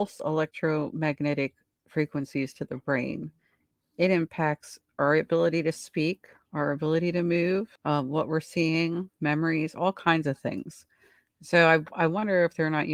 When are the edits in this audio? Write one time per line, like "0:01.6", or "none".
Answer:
0:07.8